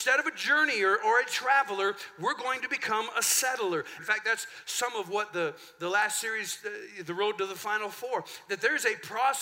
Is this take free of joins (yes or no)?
no